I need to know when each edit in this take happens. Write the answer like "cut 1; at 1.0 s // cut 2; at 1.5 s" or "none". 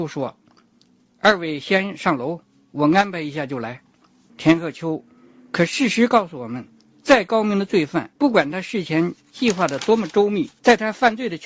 cut 1; at 5.1 s // cut 2; at 8.1 s